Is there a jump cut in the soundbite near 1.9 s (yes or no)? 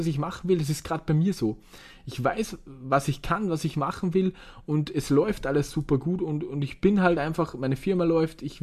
no